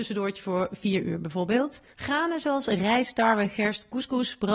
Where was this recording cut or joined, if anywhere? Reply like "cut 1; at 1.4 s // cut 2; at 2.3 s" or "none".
cut 1; at 1.9 s

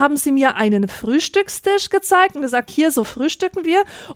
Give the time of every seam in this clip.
cut 1; at 2.7 s

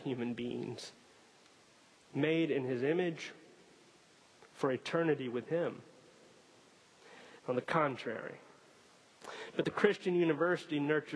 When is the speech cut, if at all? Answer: cut 1; at 7.4 s

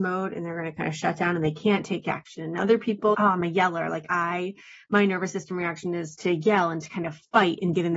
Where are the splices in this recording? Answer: cut 1; at 3.1 s

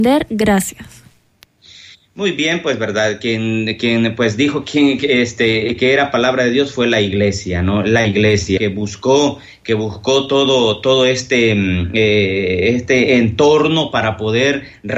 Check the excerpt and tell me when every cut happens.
cut 1; at 8.6 s

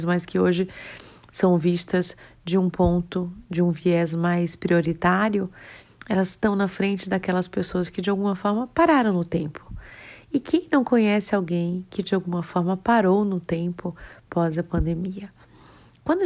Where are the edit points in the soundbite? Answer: none

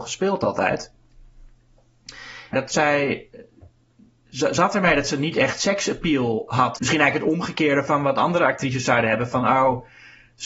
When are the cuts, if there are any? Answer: cut 1; at 2.5 s // cut 2; at 6.8 s

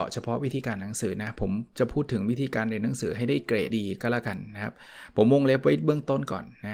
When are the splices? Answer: cut 1; at 3.7 s

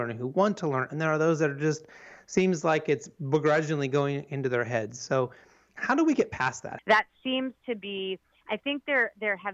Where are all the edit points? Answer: cut 1; at 6.8 s

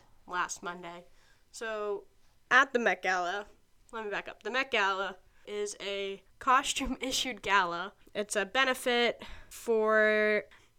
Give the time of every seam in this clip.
cut 1; at 3.9 s // cut 2; at 5.4 s

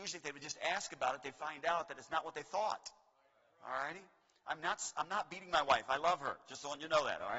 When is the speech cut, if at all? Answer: none

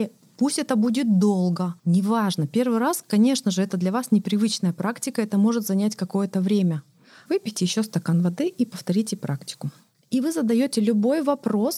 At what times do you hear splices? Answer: cut 1; at 1.8 s // cut 2; at 7.3 s

